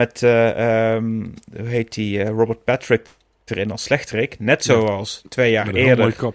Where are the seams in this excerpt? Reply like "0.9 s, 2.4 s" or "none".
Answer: none